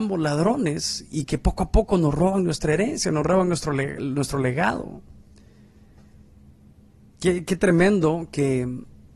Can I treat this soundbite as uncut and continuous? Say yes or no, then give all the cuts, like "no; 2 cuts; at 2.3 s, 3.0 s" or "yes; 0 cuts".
yes; 0 cuts